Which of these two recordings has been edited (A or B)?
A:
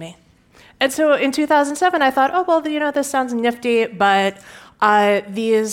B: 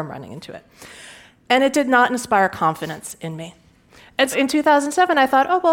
B